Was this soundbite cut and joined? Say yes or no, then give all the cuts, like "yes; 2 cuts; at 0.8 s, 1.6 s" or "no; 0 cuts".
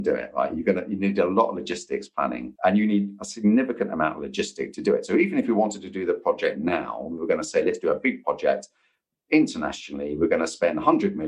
yes; 1 cut; at 2.6 s